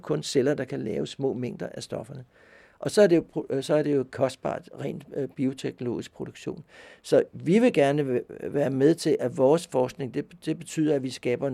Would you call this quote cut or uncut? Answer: uncut